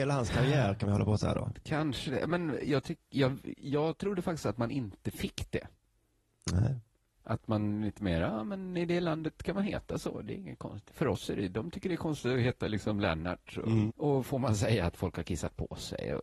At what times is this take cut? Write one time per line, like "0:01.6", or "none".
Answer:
0:13.9